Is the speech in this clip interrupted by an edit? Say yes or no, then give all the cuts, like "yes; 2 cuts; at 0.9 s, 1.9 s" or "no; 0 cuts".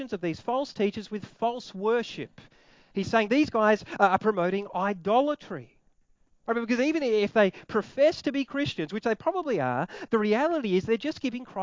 no; 0 cuts